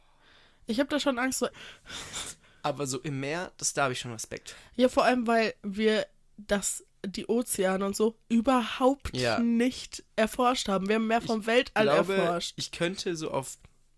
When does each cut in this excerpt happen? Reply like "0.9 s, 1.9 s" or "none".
1.5 s